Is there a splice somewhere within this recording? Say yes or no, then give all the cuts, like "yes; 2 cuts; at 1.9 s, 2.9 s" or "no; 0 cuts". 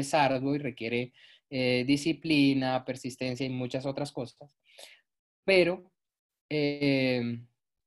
no; 0 cuts